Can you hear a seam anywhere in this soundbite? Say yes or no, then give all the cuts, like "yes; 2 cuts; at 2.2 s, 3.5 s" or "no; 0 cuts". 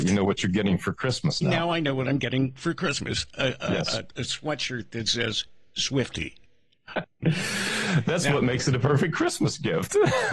yes; 1 cut; at 7.0 s